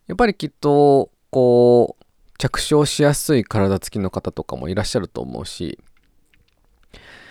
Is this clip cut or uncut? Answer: uncut